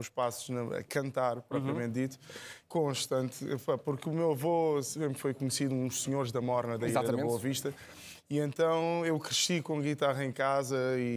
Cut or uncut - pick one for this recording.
cut